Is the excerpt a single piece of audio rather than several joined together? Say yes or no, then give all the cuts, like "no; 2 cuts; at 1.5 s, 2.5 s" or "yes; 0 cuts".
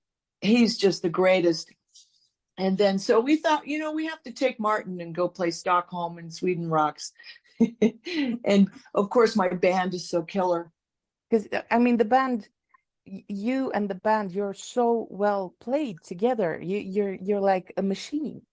yes; 0 cuts